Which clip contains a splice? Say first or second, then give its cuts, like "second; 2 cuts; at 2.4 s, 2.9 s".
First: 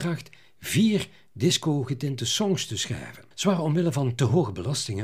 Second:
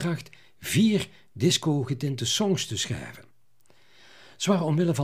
first; 1 cut; at 3.3 s